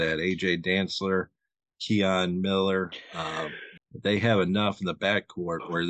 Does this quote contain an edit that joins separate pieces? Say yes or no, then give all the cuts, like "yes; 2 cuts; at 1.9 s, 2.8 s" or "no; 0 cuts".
yes; 1 cut; at 3.8 s